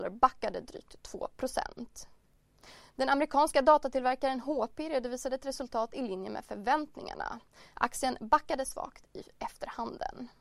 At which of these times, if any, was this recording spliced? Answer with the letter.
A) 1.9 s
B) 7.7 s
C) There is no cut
C